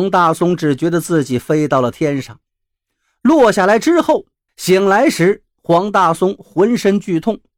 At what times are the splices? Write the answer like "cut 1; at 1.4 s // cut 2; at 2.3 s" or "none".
cut 1; at 4.5 s